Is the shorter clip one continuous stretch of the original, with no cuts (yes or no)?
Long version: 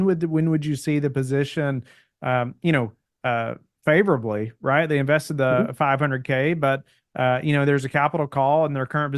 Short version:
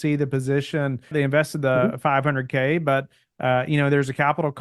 no